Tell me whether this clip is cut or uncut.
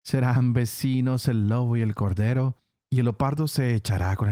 uncut